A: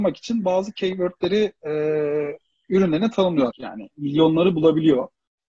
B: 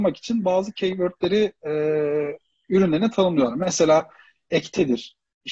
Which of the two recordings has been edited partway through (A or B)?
A